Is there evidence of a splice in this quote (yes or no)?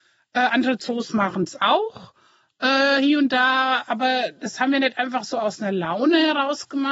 no